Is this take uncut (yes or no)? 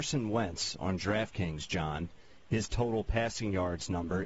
yes